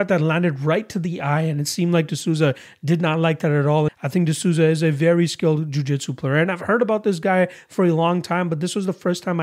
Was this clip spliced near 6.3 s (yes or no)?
no